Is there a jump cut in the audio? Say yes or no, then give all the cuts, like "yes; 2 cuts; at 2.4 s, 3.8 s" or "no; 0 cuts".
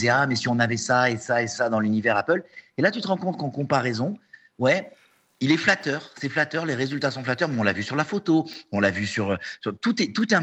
no; 0 cuts